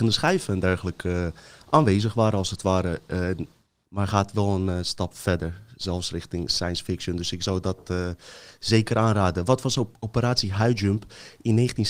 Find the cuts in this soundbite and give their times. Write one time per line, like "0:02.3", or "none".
0:03.8